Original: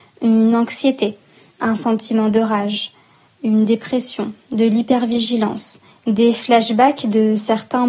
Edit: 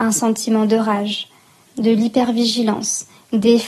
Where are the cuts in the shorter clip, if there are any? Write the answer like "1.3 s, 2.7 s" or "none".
1.7 s